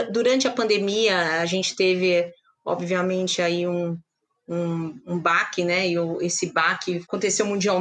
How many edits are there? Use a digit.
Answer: 0